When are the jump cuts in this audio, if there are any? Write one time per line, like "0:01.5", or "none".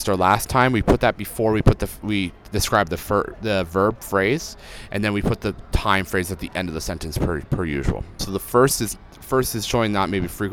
0:08.2